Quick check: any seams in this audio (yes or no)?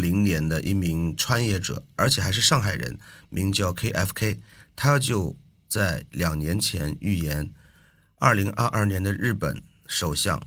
no